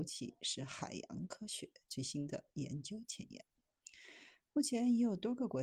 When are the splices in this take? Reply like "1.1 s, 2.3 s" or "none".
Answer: none